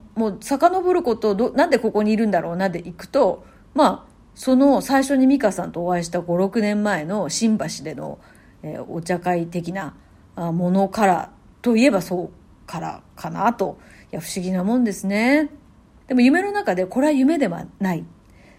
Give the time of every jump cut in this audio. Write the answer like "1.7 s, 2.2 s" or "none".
16.0 s

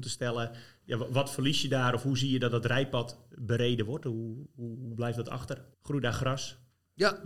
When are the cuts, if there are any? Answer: 5.7 s

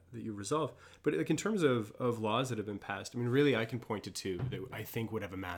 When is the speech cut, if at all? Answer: none

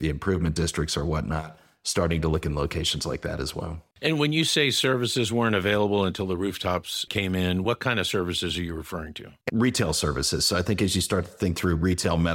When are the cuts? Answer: 3.9 s, 7.1 s, 9.4 s

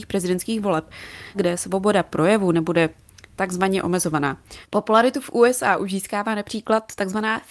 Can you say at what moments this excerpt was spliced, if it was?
1.3 s

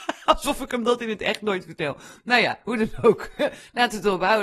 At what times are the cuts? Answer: none

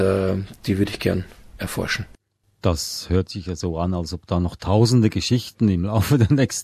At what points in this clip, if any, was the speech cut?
none

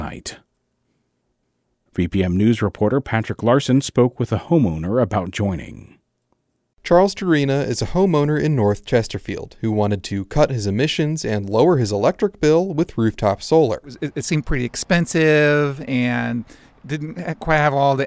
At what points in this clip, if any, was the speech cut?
1.9 s

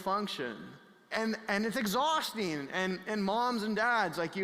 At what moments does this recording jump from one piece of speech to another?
1.1 s

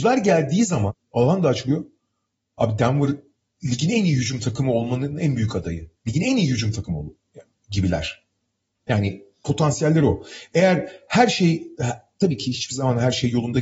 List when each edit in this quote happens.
6.0 s

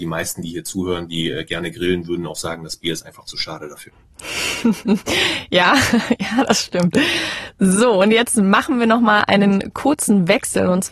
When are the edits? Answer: none

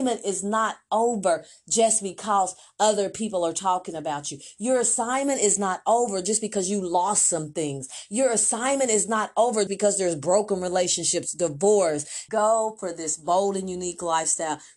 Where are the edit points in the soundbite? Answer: 9.7 s, 12.3 s

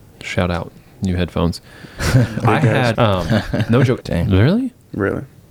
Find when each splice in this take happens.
2.9 s, 4.0 s

